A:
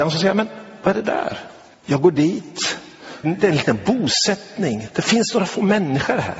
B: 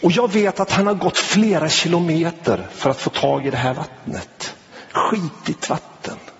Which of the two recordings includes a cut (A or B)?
A